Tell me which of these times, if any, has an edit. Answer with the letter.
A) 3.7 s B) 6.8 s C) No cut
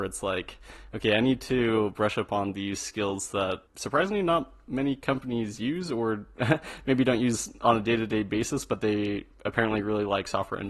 A